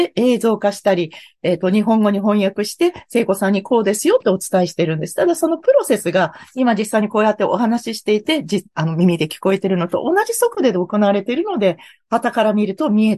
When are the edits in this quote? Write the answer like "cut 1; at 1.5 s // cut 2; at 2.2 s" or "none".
none